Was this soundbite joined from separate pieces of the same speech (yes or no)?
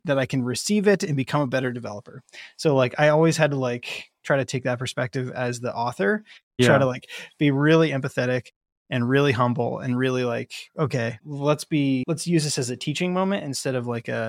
yes